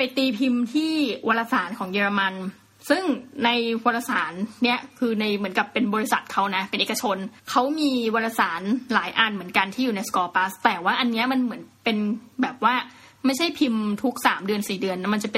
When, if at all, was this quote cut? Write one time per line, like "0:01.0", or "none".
0:07.4